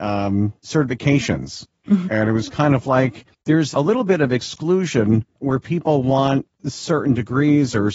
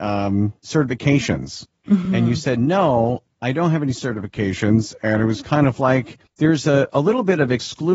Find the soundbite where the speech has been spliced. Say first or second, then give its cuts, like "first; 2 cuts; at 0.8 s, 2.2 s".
first; 2 cuts; at 2.1 s, 3.7 s